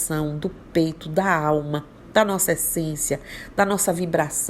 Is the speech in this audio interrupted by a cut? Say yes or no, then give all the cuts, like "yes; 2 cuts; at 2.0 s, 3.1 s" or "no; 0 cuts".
no; 0 cuts